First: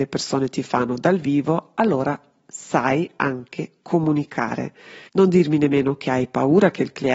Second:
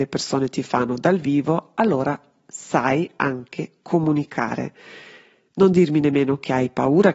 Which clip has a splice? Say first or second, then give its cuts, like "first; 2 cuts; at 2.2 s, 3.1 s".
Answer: first; 1 cut; at 5.1 s